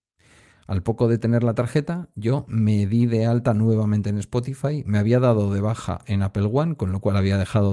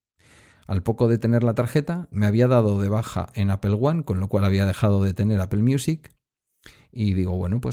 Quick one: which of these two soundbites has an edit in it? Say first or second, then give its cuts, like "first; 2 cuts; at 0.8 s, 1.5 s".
second; 1 cut; at 2.1 s